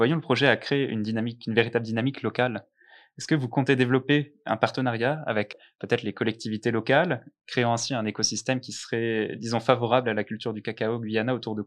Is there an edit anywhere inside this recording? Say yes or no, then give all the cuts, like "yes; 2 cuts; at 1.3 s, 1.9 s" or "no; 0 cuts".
no; 0 cuts